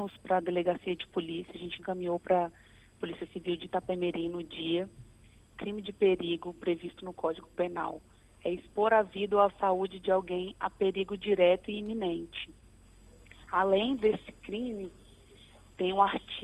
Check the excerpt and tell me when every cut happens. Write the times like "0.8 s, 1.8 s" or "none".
none

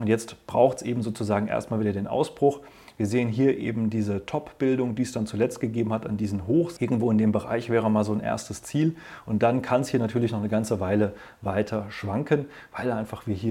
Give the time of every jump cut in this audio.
6.8 s

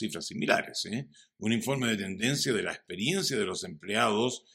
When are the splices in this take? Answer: none

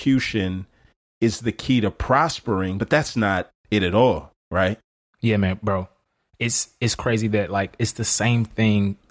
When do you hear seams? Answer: none

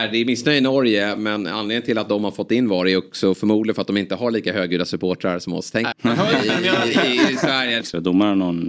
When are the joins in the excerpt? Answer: 5.9 s, 7.8 s

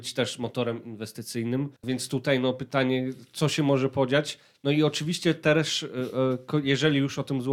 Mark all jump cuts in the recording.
none

